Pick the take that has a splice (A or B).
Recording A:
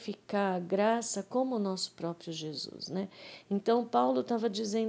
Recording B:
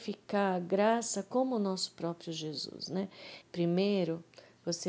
B